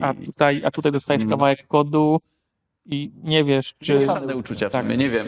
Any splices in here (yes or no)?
no